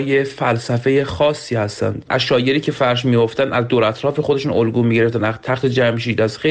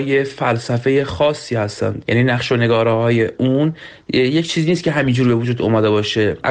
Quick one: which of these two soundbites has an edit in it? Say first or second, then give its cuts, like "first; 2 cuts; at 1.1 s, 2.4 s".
first; 1 cut; at 2.1 s